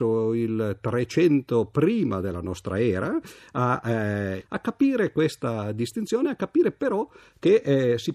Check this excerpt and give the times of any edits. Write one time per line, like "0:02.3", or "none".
0:04.4